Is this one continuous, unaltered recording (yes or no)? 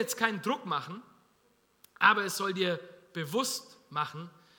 yes